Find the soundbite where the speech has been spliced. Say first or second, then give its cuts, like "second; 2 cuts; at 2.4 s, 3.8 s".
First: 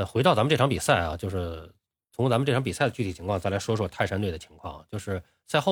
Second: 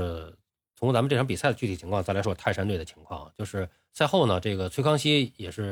second; 1 cut; at 2.2 s